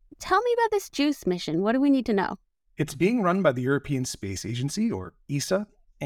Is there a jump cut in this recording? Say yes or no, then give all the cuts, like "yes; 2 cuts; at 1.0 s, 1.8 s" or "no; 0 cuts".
no; 0 cuts